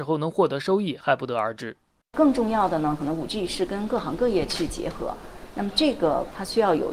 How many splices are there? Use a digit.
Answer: 1